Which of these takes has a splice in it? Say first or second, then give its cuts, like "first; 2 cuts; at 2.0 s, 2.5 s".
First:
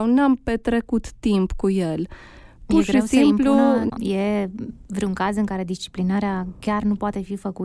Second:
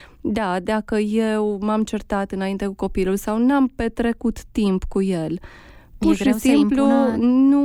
first; 1 cut; at 3.9 s